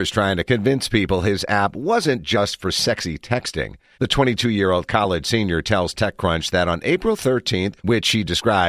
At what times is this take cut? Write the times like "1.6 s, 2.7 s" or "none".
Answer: 3.9 s, 7.8 s